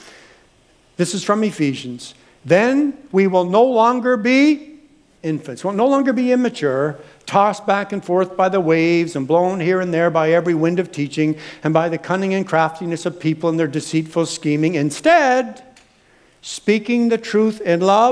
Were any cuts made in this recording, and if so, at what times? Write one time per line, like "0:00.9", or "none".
none

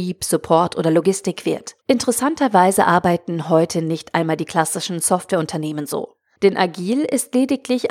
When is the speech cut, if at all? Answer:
0:01.8
0:06.4

